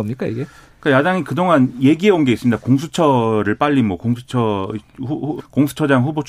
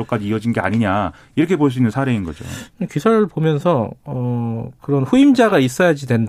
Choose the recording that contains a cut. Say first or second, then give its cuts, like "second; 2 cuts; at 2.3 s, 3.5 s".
first; 1 cut; at 5.4 s